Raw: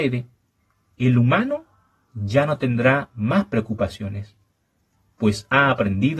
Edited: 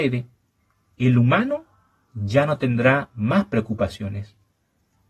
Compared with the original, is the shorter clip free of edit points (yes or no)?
yes